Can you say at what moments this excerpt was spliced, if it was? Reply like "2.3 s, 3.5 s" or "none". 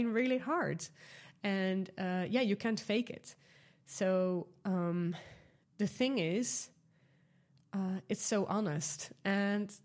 none